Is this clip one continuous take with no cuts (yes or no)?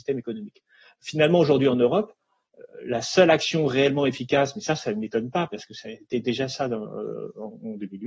yes